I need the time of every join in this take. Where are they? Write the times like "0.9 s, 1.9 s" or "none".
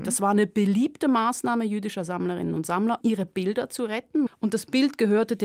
3.0 s, 4.3 s